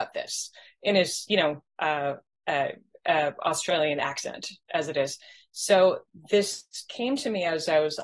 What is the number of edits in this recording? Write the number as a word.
zero